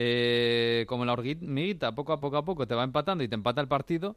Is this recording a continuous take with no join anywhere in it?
no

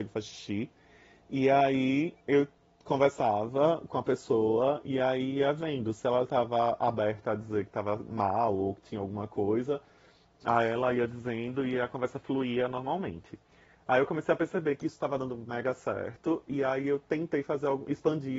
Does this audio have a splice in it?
no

